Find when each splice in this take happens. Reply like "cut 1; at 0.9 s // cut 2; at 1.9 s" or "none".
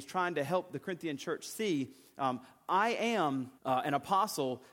cut 1; at 3.6 s